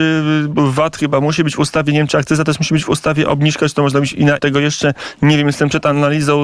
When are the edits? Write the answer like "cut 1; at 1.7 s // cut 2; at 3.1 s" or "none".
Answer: cut 1; at 4.4 s